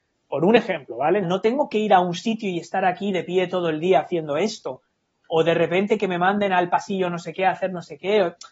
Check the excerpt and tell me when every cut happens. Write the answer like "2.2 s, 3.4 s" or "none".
1.2 s